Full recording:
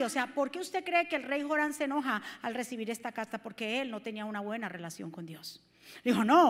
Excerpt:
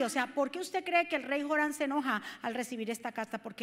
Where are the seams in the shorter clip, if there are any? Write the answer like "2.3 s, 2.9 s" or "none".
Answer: none